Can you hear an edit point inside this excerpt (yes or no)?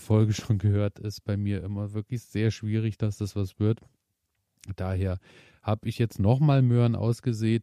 no